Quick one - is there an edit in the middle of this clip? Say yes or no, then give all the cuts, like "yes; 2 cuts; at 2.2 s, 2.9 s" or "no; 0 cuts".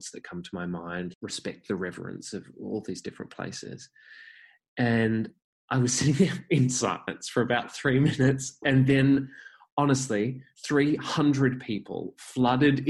yes; 1 cut; at 1.1 s